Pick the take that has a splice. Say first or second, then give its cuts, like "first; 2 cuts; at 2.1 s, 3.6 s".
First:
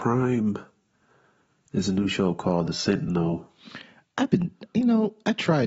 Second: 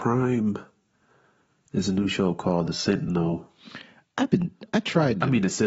second; 1 cut; at 4.7 s